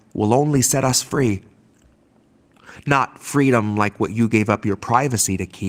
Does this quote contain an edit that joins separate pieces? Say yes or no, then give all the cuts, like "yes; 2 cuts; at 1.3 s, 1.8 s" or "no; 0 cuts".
no; 0 cuts